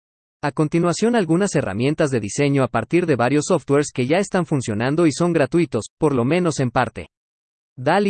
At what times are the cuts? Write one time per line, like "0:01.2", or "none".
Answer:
none